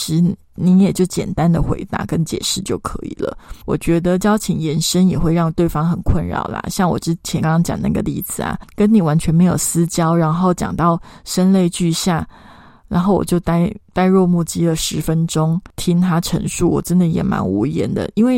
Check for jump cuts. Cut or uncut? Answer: cut